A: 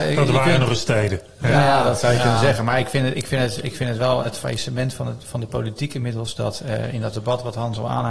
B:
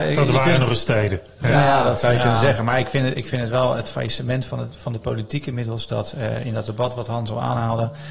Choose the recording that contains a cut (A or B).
B